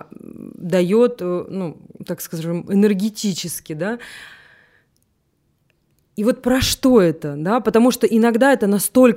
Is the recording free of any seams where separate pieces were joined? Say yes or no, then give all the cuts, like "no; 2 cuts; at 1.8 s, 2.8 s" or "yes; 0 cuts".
yes; 0 cuts